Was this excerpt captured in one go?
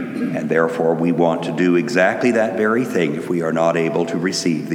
yes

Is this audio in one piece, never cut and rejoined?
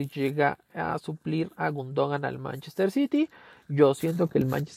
yes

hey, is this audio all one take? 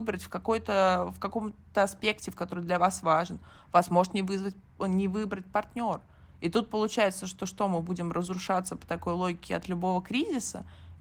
yes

